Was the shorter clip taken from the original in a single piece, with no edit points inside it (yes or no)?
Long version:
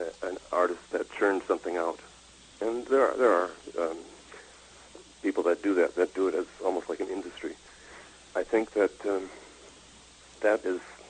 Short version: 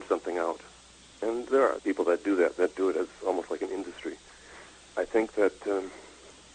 no